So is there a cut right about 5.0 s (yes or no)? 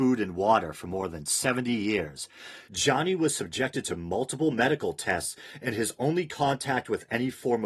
no